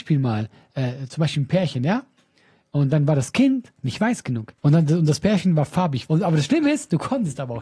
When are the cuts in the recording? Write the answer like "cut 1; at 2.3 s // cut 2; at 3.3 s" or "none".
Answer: cut 1; at 4.6 s // cut 2; at 6.1 s

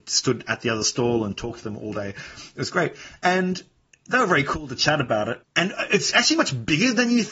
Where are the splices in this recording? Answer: none

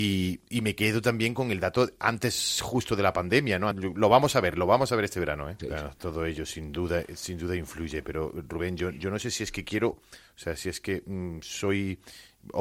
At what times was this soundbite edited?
cut 1; at 3.7 s // cut 2; at 5.6 s // cut 3; at 9.9 s

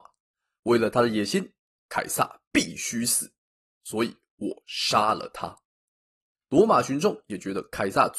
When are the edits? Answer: cut 1; at 6.3 s

